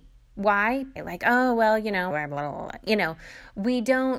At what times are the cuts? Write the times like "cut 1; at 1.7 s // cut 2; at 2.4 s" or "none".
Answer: cut 1; at 1.0 s // cut 2; at 2.1 s